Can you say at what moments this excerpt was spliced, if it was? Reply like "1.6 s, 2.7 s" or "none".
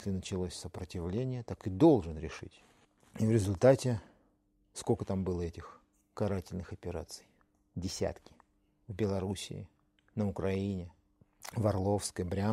none